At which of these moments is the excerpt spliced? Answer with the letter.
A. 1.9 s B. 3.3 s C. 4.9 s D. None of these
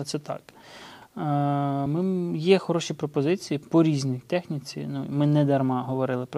D